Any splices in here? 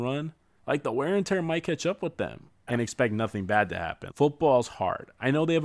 yes; 2 cuts; at 2.7 s, 4.1 s

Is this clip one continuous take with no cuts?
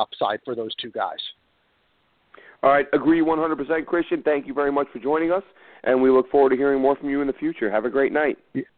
yes; 0 cuts

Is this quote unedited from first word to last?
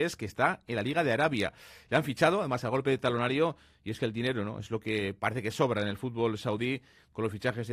yes; 0 cuts

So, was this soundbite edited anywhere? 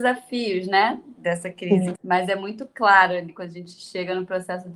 yes; 1 cut; at 2.0 s

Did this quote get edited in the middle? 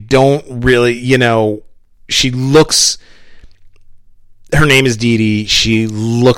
no; 0 cuts

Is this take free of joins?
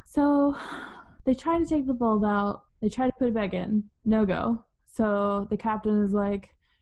yes; 0 cuts

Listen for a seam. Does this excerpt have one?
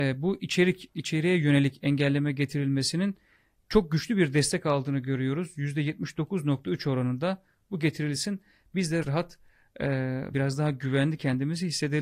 yes; 2 cuts; at 9.0 s, 10.3 s

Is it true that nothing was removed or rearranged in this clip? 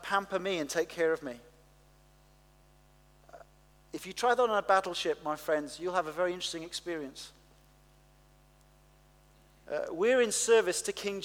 yes; 0 cuts

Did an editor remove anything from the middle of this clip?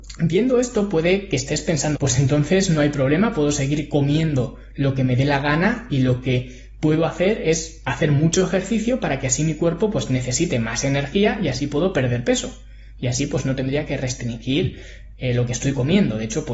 yes; 1 cut; at 1.9 s

